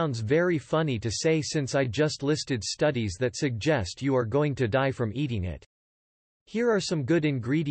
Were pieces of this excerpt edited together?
no; 0 cuts

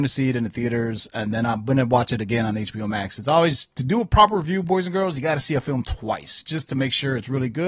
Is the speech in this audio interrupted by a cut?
no; 0 cuts

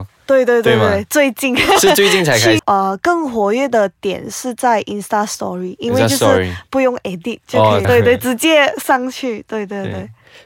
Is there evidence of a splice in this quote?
yes; 2 cuts; at 2.6 s, 7.8 s

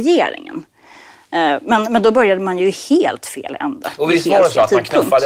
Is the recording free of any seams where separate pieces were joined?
yes; 0 cuts

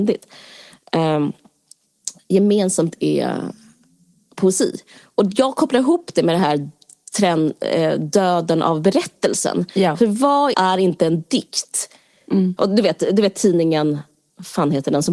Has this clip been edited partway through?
yes; 2 cuts; at 10.5 s, 12.6 s

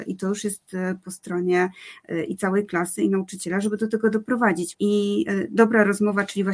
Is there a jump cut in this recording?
yes; 1 cut; at 4.7 s

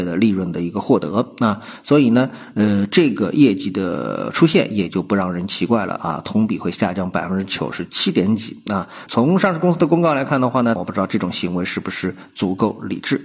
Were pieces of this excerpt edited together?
yes; 2 cuts; at 9.1 s, 10.8 s

